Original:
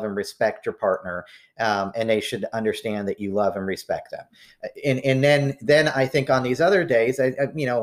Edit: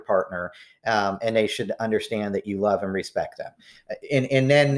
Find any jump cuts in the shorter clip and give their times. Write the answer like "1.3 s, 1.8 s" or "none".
none